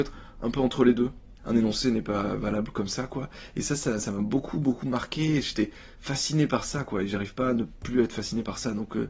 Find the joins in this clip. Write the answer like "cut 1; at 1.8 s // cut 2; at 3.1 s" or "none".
cut 1; at 1.4 s

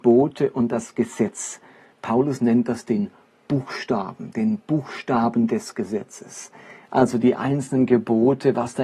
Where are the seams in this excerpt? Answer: none

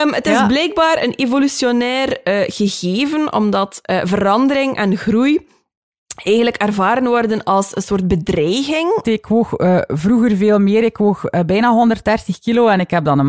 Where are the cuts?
cut 1; at 9.0 s

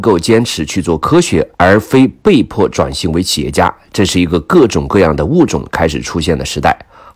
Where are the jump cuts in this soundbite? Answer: cut 1; at 1.5 s

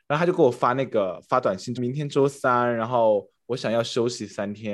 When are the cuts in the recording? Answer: cut 1; at 1.8 s

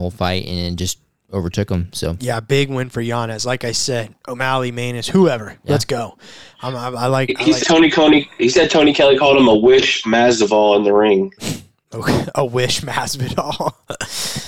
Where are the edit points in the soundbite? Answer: cut 1; at 7.6 s

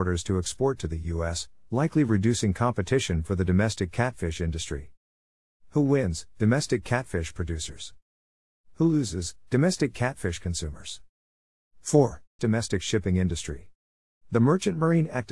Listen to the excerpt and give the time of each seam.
cut 1; at 12.4 s // cut 2; at 14.2 s

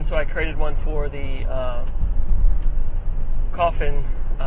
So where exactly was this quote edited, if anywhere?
none

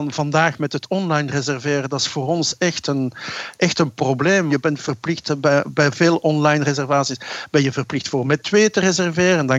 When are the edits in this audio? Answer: none

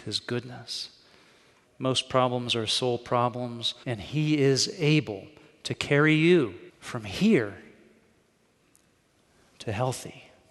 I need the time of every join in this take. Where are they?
cut 1; at 1.7 s // cut 2; at 3.8 s // cut 3; at 6.7 s

